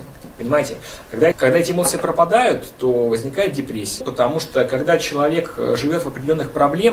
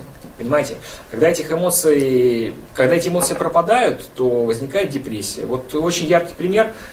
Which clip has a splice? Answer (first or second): first